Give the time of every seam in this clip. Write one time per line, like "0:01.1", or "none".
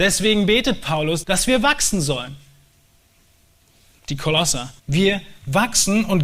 0:01.2
0:04.8